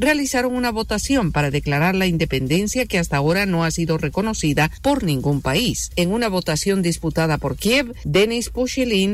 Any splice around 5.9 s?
yes; 1 cut; at 5.9 s

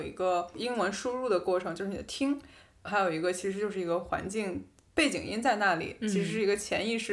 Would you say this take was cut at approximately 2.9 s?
yes; 1 cut; at 2.9 s

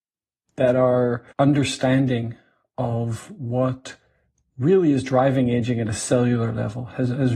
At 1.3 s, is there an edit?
yes; 1 cut; at 1.3 s

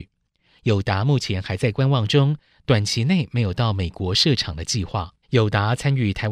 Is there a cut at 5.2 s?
yes; 1 cut; at 5.2 s

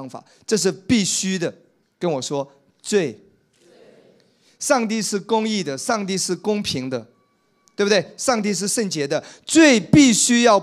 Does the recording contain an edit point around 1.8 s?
yes; 1 cut; at 1.8 s

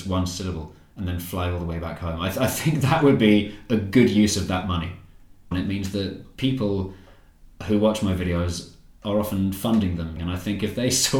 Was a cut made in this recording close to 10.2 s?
yes; 2 cuts; at 5.5 s, 10.2 s

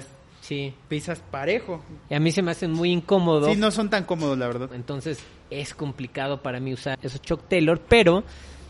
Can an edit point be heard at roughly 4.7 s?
yes; 2 cuts; at 4.7 s, 6.9 s

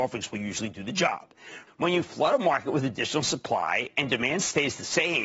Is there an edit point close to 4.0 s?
no; 1 cut; at 1.7 s

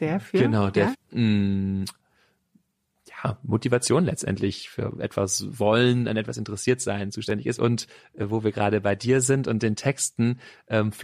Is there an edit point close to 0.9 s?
yes; 2 cuts; at 0.9 s, 7.6 s

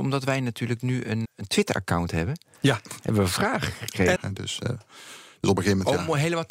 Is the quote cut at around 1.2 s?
yes; 2 cuts; at 1.2 s, 4.2 s

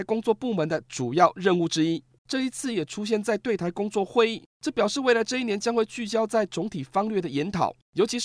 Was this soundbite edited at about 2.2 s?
yes; 1 cut; at 2.2 s

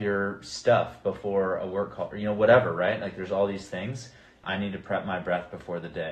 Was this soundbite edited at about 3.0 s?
no; 1 cut; at 4.4 s

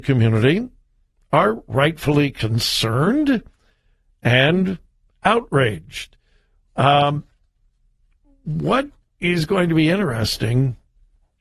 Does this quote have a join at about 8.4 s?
no; 1 cut; at 6.7 s

